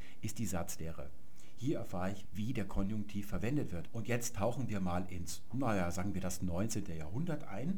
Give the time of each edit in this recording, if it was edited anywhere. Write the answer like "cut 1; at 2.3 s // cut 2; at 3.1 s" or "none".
cut 1; at 2.2 s // cut 2; at 3.9 s